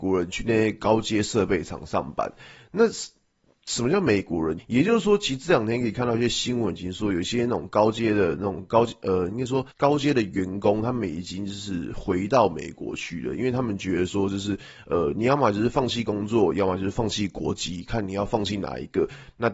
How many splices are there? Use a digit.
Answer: 2